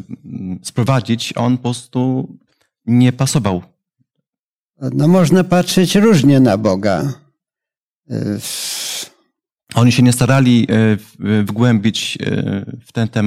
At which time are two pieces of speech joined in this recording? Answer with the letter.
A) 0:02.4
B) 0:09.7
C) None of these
B